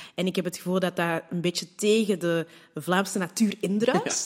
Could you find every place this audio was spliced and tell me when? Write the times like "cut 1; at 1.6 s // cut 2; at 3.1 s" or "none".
none